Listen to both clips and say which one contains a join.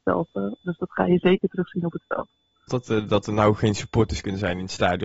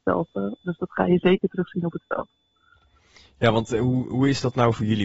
first; 1 cut; at 2.7 s

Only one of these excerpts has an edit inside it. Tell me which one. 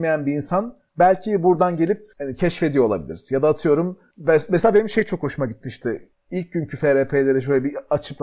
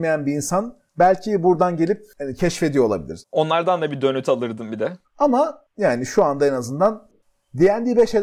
second; 2 cuts; at 3.2 s, 5.0 s

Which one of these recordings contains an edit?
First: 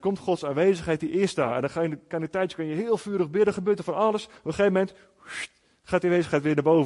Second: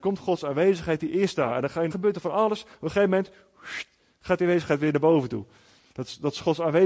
second; 1 cut; at 1.9 s

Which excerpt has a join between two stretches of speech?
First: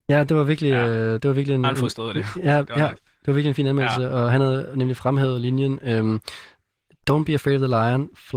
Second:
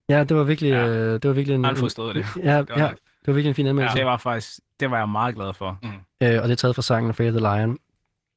second; 2 cuts; at 3.9 s, 5.8 s

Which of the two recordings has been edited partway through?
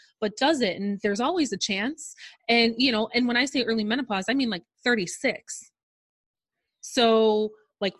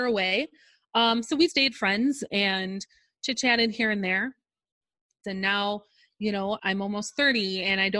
second; 3 cuts; at 1.5 s, 5.2 s, 6.6 s

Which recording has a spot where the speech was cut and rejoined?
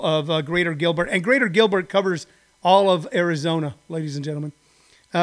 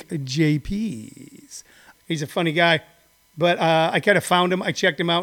second; 1 cut; at 1.9 s

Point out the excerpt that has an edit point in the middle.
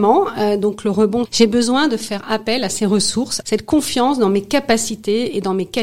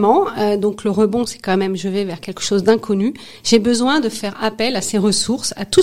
first; 2 cuts; at 1.3 s, 3.4 s

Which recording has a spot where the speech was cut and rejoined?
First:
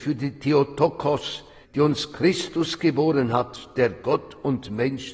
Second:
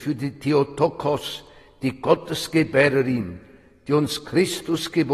first; 1 cut; at 1.6 s

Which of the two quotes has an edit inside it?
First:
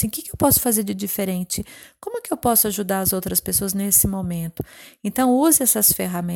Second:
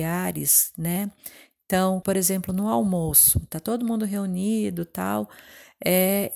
second; 1 cut; at 2.0 s

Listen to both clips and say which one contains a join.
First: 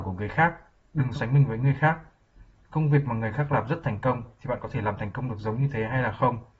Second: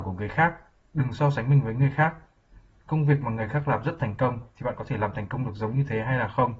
first; 1 cut; at 1.2 s

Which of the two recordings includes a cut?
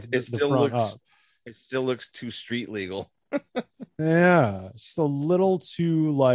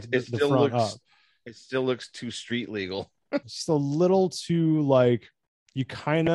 second; 1 cut; at 3.4 s

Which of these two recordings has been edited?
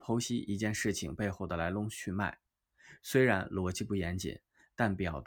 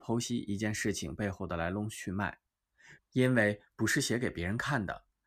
second; 1 cut; at 3.0 s

